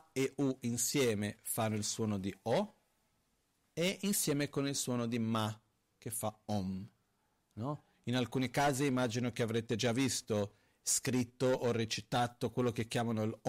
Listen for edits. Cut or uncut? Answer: uncut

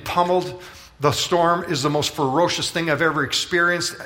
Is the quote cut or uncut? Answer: uncut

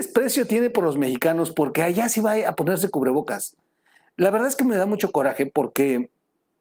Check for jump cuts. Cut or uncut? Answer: uncut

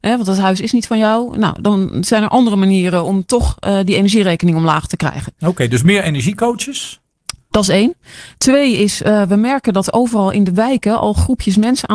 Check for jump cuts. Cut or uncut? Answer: uncut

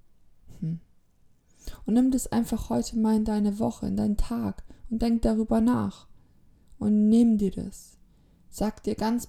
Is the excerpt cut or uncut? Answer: uncut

